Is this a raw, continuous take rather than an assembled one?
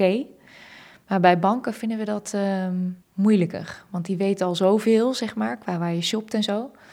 no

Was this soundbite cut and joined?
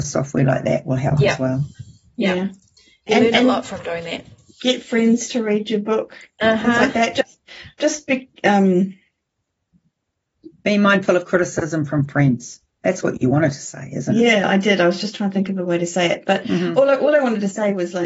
no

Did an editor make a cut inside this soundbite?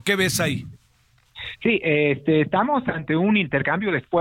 no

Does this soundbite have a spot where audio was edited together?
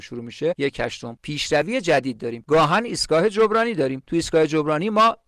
no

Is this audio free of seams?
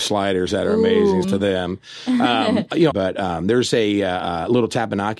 no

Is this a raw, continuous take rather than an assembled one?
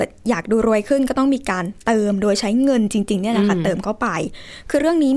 yes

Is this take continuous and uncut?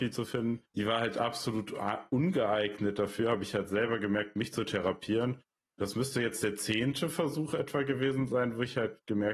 yes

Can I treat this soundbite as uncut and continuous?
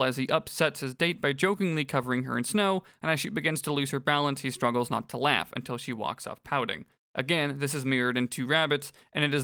no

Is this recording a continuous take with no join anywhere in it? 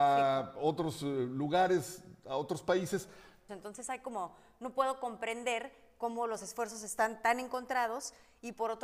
no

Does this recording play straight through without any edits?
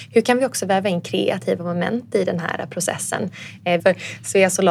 no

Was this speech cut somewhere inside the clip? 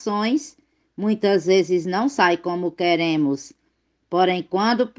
no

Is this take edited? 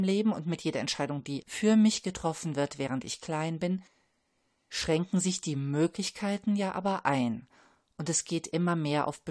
no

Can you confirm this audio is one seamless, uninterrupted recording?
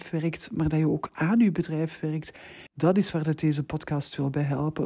no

